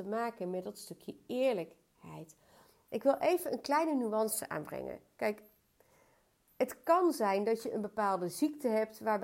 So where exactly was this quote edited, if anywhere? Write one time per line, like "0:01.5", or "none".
none